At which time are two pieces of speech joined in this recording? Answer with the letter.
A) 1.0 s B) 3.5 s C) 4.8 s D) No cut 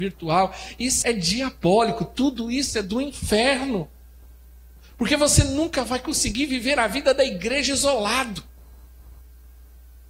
A